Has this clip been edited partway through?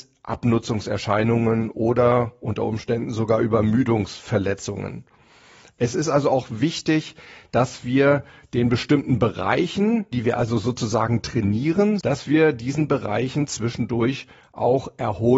yes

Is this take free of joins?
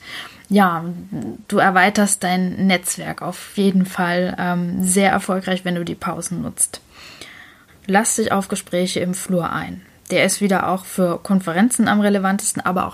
no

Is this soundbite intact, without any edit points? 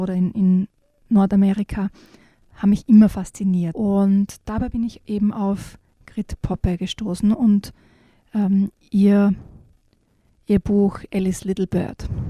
no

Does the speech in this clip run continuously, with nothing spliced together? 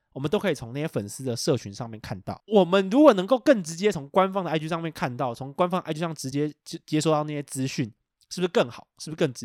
yes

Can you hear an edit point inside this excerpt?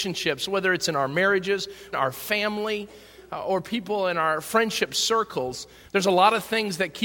yes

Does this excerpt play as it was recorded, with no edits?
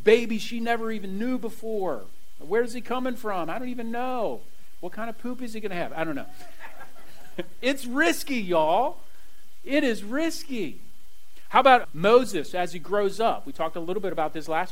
no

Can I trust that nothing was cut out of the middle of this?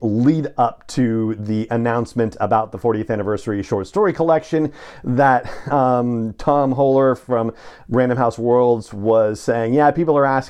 yes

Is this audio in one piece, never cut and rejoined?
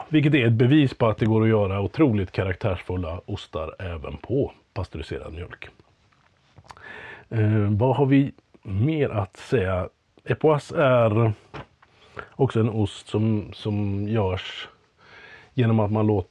yes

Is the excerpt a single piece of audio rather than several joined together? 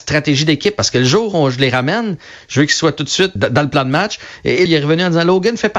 no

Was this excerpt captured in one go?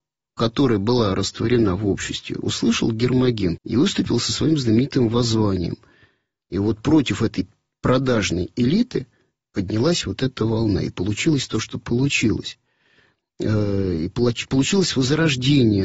no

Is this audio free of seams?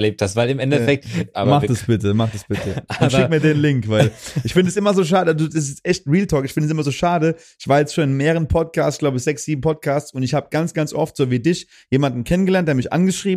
no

